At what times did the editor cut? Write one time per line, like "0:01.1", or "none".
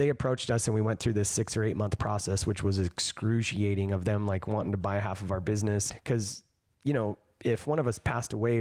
0:05.9